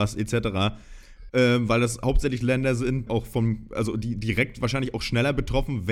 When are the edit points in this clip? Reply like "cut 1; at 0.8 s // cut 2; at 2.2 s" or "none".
cut 1; at 1.3 s // cut 2; at 3.1 s